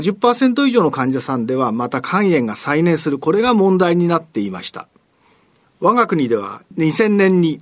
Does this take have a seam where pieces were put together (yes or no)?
yes